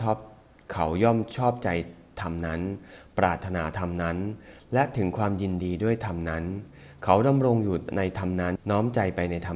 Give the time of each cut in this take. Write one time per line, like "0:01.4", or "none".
0:08.6